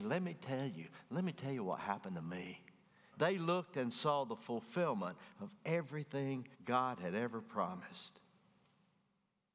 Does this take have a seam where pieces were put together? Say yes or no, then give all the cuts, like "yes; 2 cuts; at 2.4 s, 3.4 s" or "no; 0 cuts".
yes; 2 cuts; at 3.1 s, 6.5 s